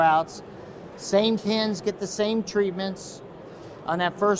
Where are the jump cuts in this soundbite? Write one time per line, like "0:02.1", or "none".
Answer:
none